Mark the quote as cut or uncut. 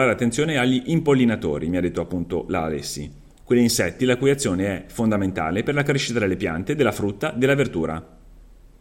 uncut